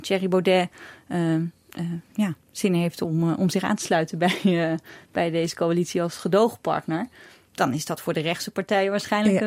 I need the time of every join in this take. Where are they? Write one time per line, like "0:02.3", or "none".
none